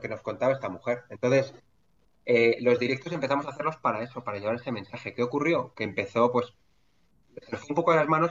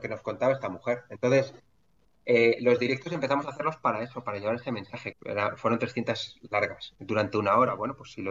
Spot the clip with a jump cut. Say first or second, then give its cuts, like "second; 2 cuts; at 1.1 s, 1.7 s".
second; 1 cut; at 5.1 s